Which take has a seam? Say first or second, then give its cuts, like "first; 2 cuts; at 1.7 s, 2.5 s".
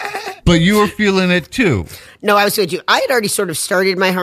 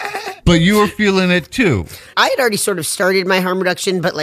second; 1 cut; at 2.1 s